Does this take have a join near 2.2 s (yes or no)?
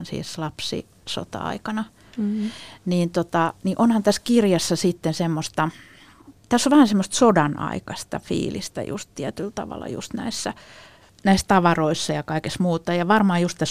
no